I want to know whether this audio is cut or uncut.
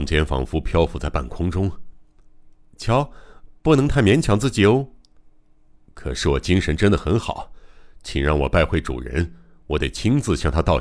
uncut